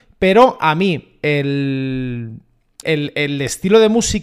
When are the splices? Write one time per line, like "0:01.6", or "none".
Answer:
0:02.8